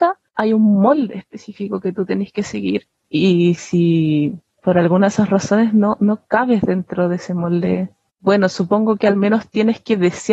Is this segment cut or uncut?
uncut